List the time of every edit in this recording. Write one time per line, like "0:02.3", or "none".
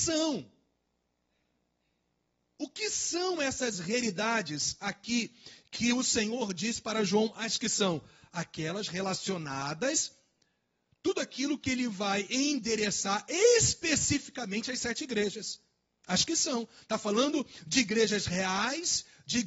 none